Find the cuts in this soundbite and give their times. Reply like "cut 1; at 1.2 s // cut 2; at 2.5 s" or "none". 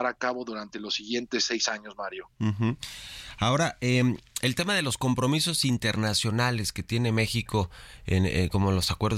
cut 1; at 2.3 s

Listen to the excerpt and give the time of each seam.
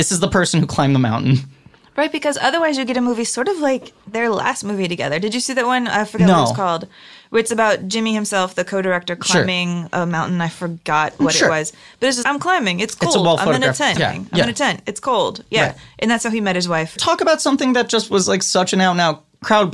cut 1; at 12.2 s // cut 2; at 14.0 s // cut 3; at 17.0 s

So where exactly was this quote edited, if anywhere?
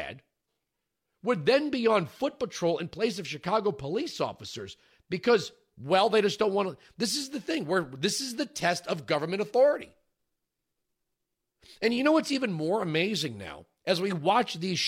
none

